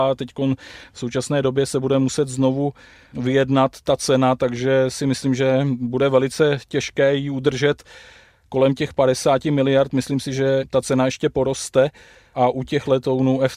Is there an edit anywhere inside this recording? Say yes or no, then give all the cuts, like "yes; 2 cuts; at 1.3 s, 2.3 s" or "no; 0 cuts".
no; 0 cuts